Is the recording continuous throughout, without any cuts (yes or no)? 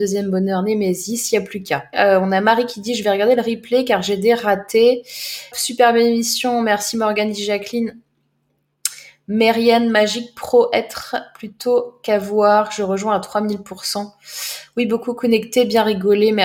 no